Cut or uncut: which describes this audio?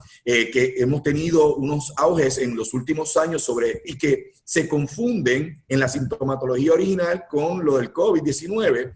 cut